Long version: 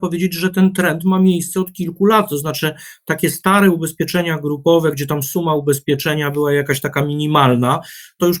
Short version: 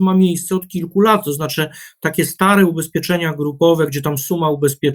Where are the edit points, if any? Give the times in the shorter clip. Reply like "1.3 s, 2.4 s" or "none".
none